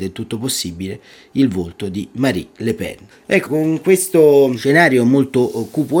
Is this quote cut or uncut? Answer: cut